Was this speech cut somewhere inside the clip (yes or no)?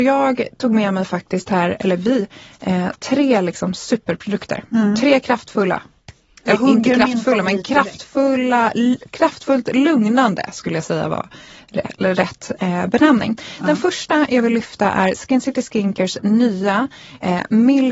no